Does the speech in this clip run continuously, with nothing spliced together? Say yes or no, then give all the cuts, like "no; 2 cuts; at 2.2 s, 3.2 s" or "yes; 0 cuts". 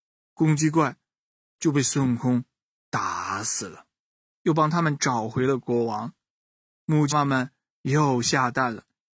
no; 2 cuts; at 4.3 s, 7.1 s